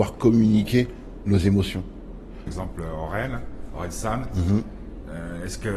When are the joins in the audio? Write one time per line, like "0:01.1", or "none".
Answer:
0:02.5

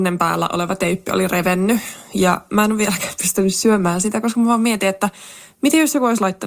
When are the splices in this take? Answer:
none

